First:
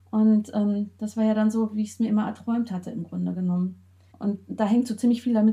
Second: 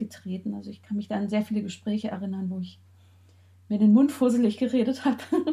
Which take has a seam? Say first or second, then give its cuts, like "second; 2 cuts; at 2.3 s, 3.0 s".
first; 1 cut; at 4.1 s